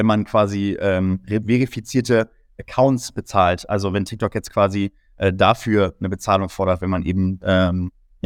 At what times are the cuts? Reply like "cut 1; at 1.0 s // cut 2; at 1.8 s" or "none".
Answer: none